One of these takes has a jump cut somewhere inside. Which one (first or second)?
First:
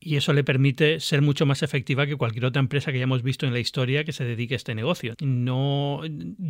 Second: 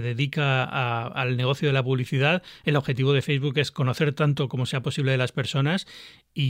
first